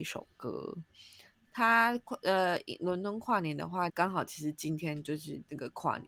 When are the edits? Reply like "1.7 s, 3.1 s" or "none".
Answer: 1.4 s, 3.9 s